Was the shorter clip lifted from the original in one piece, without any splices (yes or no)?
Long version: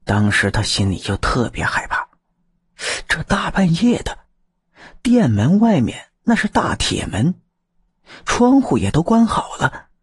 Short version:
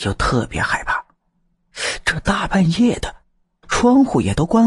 no